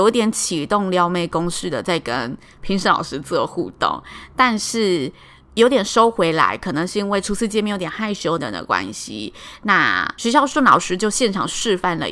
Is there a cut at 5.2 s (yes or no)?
no